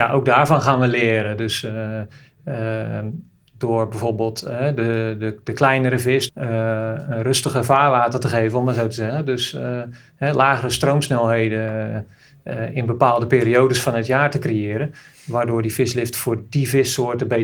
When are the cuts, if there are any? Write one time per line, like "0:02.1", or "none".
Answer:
0:06.3